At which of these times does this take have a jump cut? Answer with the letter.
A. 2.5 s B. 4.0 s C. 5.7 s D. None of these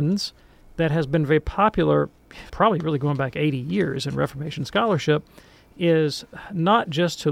A